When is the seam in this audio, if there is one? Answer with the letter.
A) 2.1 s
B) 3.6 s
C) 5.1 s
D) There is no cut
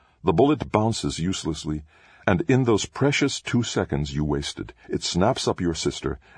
D